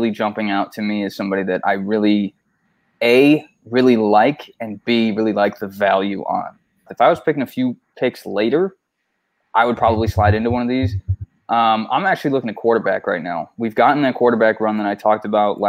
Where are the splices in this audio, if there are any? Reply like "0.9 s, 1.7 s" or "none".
6.9 s